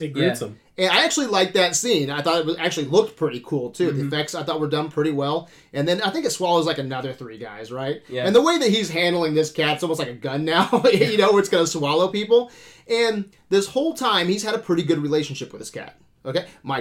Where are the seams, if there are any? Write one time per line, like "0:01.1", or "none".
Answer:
none